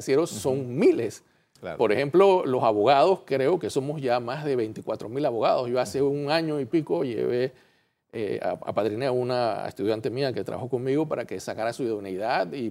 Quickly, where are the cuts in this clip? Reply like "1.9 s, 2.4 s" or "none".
none